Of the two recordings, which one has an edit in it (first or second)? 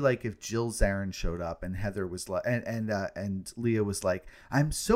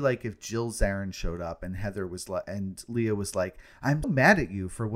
second